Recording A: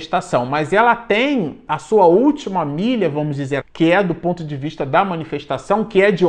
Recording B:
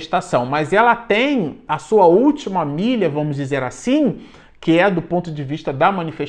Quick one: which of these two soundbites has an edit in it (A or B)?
A